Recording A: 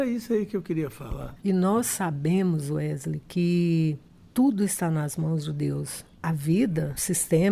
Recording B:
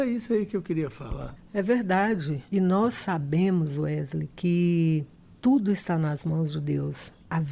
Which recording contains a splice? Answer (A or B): A